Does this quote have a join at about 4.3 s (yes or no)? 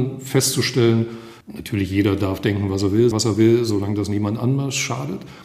no